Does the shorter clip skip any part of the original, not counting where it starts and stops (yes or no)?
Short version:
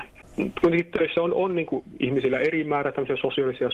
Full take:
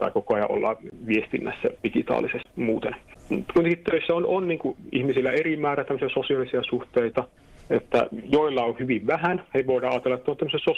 no